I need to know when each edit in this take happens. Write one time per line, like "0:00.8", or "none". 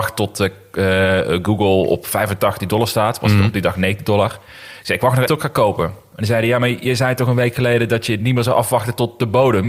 0:05.3